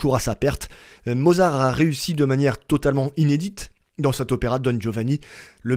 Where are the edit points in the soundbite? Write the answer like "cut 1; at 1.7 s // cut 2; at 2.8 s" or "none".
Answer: cut 1; at 1.0 s